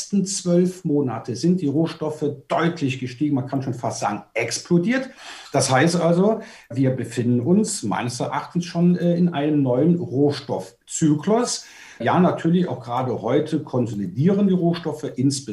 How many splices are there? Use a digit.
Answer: 0